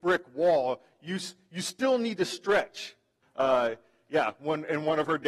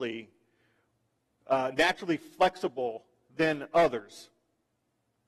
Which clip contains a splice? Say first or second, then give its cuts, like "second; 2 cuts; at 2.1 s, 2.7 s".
first; 1 cut; at 3.2 s